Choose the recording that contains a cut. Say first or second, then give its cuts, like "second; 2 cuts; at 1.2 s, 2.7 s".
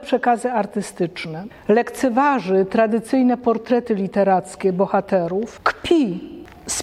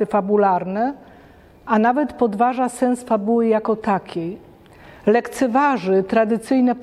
first; 1 cut; at 1.5 s